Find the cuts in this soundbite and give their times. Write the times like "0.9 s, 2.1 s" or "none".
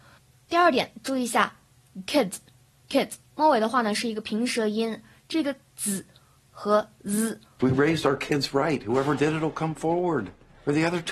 7.6 s